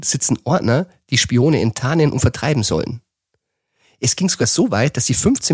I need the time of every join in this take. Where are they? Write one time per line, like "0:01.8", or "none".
none

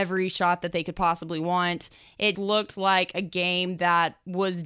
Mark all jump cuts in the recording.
0:02.4

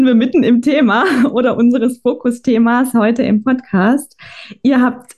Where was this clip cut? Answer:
none

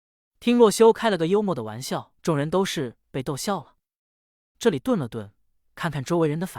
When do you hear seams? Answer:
0:02.2
0:04.5

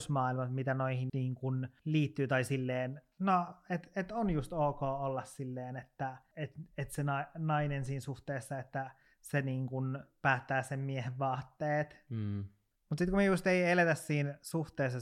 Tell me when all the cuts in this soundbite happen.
0:01.1

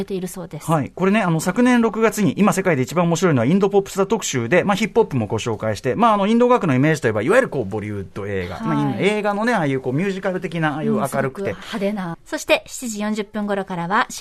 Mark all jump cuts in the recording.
0:12.1

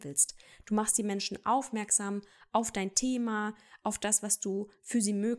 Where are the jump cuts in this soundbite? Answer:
none

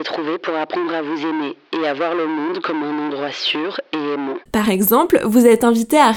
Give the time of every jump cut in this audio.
0:04.5

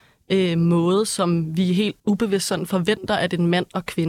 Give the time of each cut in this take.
0:02.0

